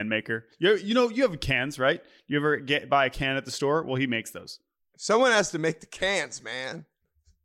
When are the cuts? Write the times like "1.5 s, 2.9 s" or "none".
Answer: none